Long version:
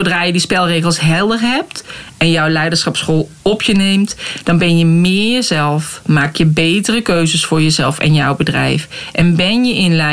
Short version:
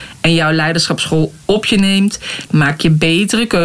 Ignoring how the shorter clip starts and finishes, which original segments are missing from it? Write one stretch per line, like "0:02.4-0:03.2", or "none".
0:04.4-0:06.0